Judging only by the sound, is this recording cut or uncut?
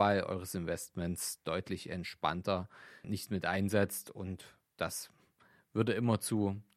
cut